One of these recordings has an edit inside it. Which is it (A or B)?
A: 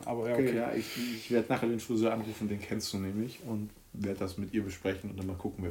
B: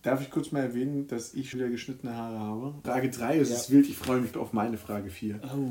B